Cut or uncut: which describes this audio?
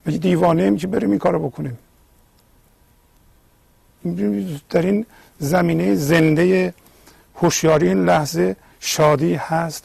cut